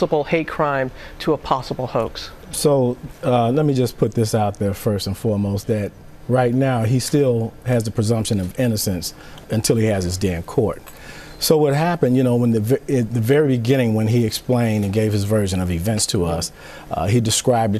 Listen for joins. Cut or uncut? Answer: cut